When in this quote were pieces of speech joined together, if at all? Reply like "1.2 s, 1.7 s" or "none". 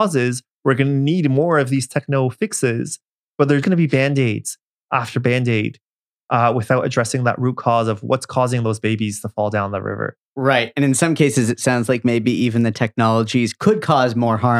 3.6 s